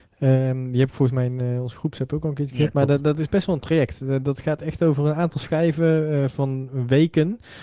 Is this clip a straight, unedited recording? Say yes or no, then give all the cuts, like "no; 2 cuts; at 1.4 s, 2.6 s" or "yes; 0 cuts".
yes; 0 cuts